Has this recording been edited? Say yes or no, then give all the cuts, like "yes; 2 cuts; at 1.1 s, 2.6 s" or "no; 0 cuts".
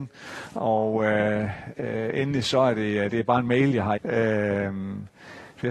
yes; 1 cut; at 4.0 s